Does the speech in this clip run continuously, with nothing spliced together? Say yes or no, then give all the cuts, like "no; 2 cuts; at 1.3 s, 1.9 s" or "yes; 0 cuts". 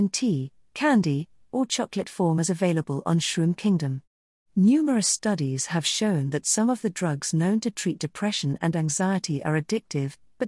yes; 0 cuts